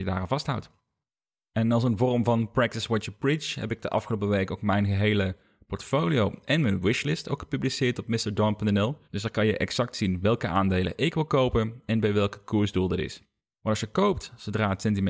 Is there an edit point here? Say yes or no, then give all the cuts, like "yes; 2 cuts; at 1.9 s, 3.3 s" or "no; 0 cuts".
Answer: yes; 2 cuts; at 9.0 s, 13.5 s